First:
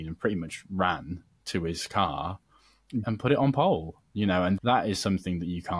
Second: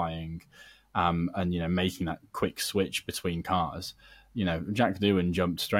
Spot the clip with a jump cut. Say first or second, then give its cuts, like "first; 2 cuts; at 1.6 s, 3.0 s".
first; 2 cuts; at 3.0 s, 4.6 s